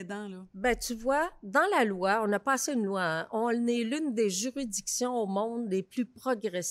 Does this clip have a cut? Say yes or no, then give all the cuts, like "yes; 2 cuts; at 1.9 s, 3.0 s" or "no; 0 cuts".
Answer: no; 0 cuts